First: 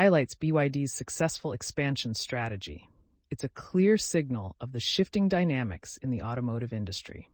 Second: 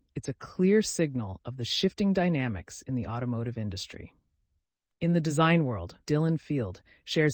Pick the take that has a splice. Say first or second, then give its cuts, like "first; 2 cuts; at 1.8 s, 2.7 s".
second; 1 cut; at 6.0 s